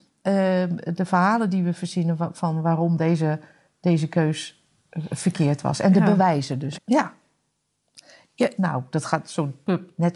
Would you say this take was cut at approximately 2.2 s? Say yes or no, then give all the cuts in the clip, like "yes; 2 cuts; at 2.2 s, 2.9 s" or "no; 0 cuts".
no; 2 cuts; at 6.7 s, 8.6 s